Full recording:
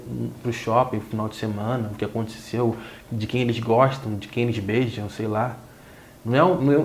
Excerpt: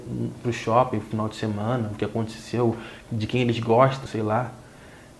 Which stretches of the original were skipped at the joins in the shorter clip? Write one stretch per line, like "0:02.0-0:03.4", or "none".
0:04.1-0:05.1

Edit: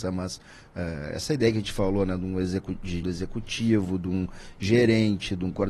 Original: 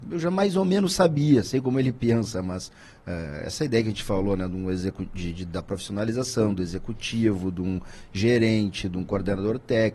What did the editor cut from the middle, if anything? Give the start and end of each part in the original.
0:05.3-0:06.5

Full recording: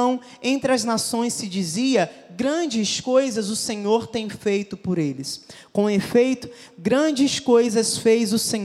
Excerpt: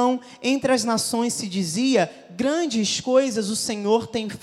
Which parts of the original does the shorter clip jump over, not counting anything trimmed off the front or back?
none

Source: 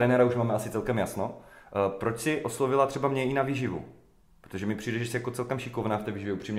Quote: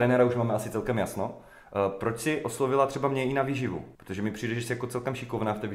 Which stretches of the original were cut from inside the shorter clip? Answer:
0:03.9-0:04.4

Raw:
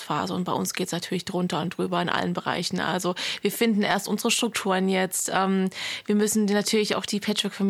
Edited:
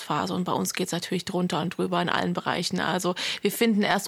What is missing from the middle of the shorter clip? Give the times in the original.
none

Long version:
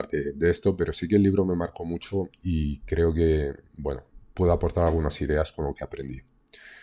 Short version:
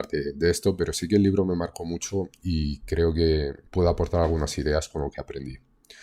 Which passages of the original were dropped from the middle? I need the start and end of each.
0:03.7-0:04.3

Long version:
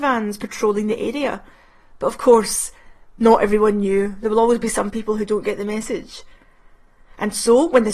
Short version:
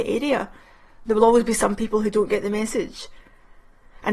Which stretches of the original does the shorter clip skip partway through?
0:02.0-0:04.2

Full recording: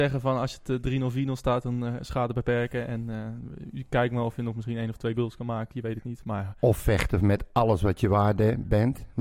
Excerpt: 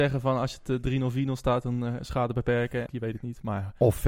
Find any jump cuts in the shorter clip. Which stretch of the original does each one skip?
0:02.9-0:05.7

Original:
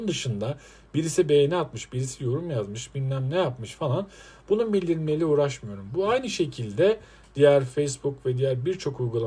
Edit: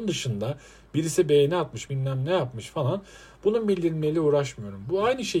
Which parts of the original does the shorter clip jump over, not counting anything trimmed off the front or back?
0:01.9-0:02.9

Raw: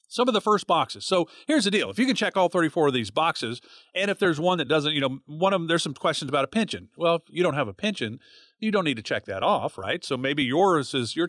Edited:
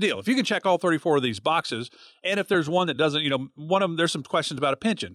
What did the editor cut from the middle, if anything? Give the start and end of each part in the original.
none

